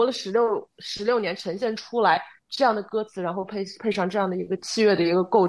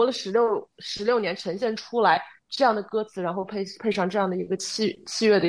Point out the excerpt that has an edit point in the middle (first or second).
first